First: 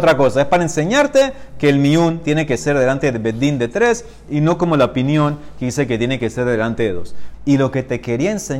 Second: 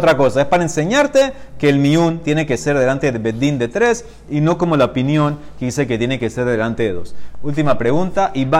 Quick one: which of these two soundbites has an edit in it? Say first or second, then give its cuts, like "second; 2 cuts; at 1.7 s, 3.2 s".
first; 1 cut; at 7.3 s